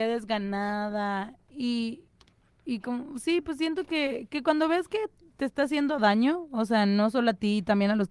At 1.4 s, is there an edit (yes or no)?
yes